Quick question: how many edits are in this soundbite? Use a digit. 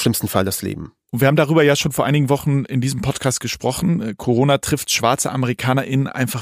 1